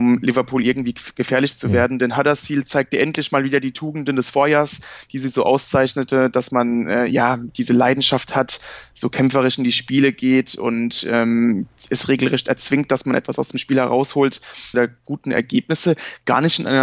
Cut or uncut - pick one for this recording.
cut